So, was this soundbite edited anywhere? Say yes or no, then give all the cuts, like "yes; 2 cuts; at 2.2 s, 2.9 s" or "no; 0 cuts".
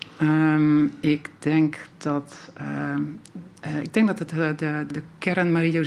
yes; 1 cut; at 4.9 s